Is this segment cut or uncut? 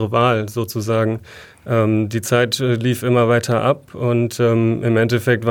uncut